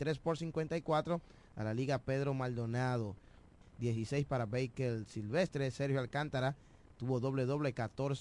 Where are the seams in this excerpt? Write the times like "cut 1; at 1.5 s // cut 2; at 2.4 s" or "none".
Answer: cut 1; at 3.6 s